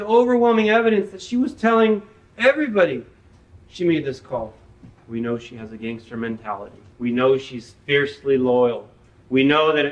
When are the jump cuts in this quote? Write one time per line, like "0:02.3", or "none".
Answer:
0:05.0
0:06.9